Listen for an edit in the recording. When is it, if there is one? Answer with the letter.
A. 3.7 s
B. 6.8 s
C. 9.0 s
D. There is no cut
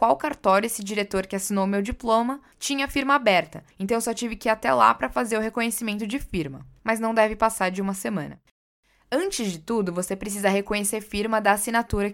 B